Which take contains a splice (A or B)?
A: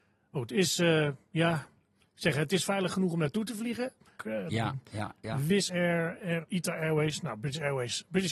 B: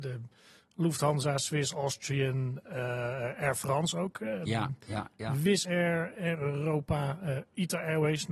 A